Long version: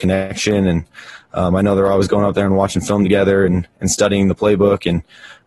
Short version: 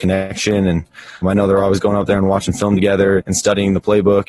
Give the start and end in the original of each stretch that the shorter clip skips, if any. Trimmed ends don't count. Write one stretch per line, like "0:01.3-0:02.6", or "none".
0:01.2-0:01.5
0:03.5-0:03.7